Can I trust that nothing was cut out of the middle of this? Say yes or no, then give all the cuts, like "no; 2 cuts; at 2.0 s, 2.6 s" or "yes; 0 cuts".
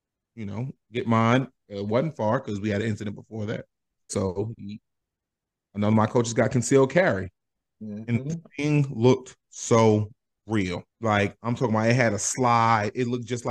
no; 3 cuts; at 4.1 s, 7.6 s, 10.9 s